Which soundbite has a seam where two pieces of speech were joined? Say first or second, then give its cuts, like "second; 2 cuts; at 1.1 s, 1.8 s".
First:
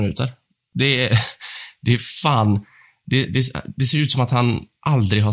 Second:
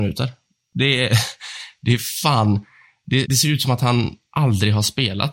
second; 1 cut; at 3.2 s